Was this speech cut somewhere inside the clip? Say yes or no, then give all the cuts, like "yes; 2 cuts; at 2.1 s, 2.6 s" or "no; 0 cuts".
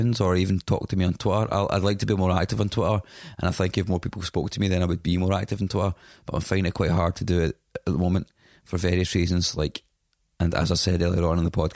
no; 0 cuts